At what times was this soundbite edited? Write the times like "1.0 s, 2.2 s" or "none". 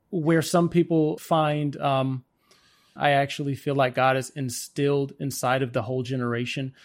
1.2 s, 3.0 s